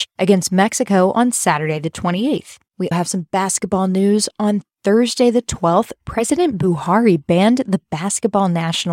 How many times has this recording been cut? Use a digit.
1